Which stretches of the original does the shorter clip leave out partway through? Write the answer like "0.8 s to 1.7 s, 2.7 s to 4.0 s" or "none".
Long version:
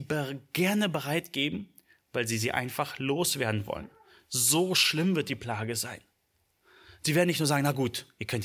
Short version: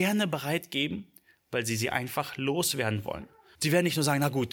4.2 s to 7.0 s